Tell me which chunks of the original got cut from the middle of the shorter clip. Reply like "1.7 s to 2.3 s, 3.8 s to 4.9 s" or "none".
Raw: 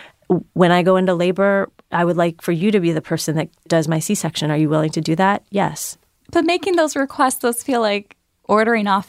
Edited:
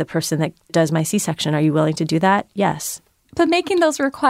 none